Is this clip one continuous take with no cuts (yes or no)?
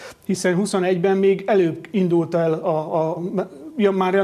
no